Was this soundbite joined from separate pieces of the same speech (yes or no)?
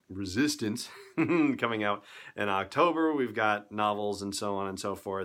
no